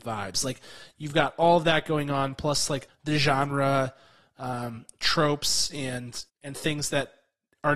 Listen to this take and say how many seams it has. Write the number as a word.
two